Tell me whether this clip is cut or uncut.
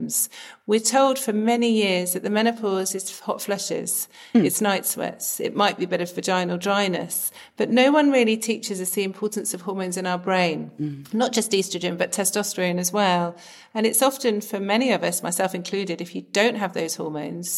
uncut